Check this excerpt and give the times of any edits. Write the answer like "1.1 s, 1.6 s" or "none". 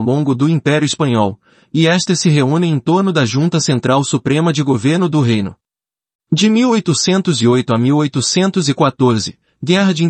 6.1 s